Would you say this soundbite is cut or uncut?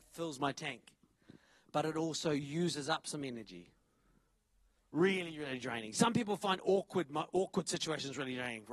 cut